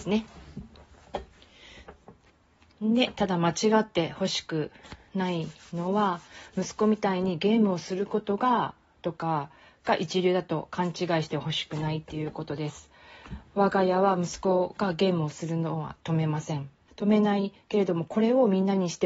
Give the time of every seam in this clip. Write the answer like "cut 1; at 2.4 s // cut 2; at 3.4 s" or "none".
cut 1; at 16.9 s